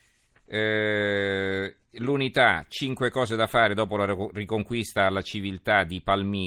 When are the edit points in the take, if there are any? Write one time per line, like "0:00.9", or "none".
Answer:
none